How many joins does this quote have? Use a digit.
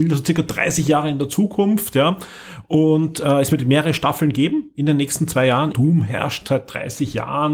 1